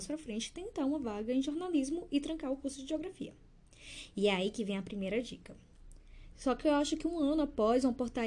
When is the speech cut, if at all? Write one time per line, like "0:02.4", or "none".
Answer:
0:06.3